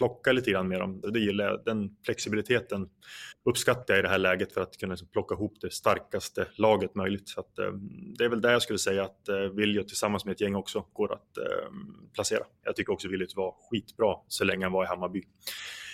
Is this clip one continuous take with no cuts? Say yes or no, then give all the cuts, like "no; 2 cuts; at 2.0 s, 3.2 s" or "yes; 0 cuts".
no; 2 cuts; at 1.0 s, 12.6 s